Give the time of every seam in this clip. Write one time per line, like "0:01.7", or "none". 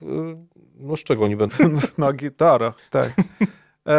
0:01.5
0:02.8